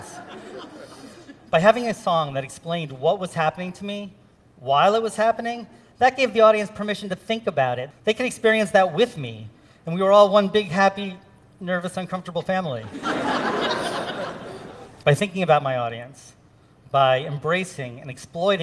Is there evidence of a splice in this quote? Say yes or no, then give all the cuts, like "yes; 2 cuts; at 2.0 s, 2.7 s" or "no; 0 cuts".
yes; 1 cut; at 7.9 s